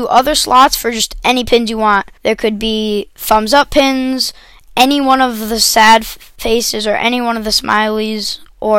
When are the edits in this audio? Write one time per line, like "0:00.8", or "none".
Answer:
0:02.2